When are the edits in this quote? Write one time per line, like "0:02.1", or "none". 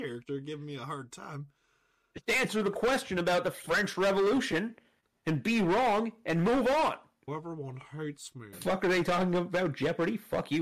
0:07.3
0:08.5